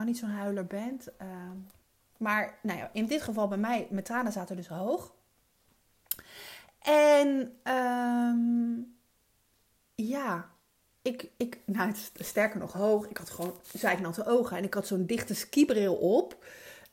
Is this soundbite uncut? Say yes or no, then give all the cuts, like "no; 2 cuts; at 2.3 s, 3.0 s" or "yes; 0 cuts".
yes; 0 cuts